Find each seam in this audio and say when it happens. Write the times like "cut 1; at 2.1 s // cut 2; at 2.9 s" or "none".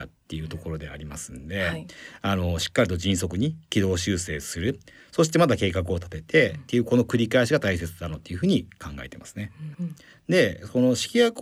cut 1; at 9.7 s

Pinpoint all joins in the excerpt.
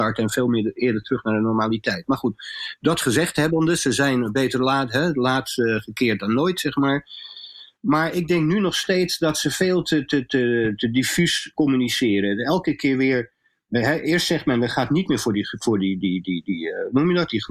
none

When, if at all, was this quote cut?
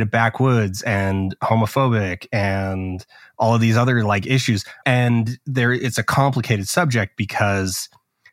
cut 1; at 4.8 s

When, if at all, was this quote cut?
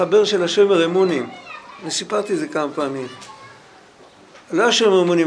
none

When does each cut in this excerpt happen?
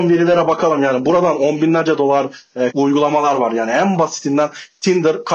cut 1; at 2.7 s

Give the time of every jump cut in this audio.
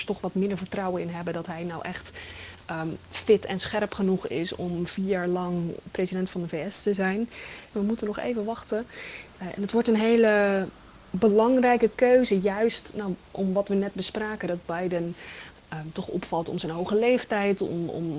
cut 1; at 7.7 s

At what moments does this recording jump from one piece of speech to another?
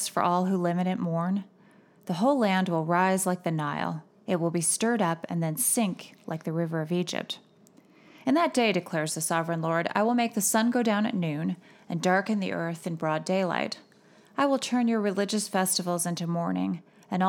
none

